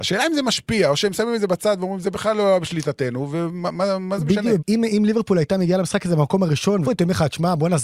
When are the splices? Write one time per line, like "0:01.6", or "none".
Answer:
0:04.6
0:06.8